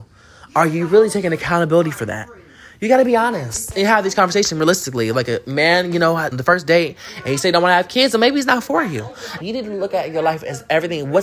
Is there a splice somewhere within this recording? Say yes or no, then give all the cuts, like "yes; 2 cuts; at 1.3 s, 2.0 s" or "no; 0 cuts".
yes; 2 cuts; at 6.3 s, 9.4 s